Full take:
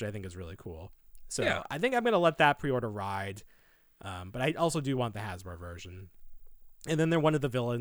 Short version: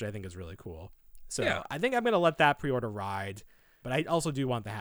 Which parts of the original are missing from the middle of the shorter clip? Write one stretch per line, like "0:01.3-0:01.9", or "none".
0:03.8-0:04.3